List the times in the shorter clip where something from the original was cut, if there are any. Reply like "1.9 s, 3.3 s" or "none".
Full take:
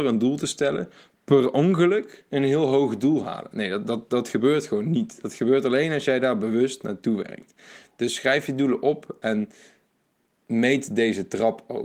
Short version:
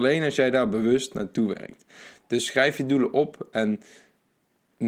none